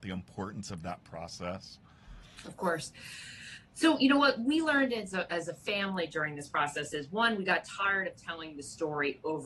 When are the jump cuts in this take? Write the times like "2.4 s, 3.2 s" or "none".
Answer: none